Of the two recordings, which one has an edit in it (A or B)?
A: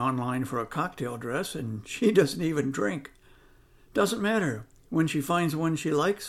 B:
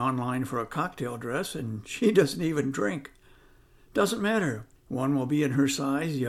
B